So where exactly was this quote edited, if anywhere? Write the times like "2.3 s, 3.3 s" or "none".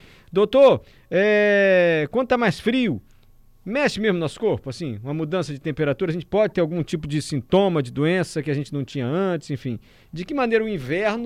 none